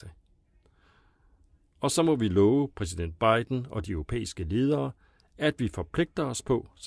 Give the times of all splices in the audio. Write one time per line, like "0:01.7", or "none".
none